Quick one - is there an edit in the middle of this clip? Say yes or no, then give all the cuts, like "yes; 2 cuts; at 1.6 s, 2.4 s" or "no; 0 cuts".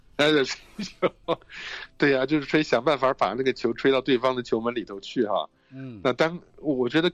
no; 0 cuts